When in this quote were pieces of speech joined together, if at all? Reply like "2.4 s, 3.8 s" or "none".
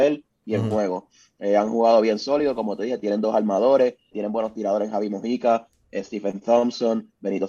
4.1 s